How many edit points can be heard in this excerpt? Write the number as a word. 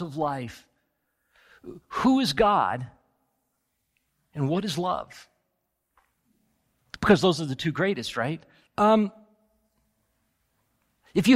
one